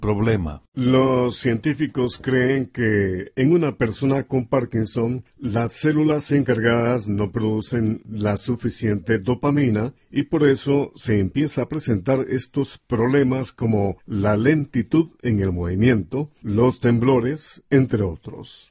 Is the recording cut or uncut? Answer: uncut